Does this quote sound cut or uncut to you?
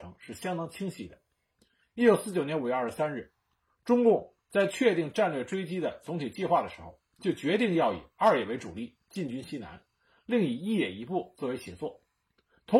uncut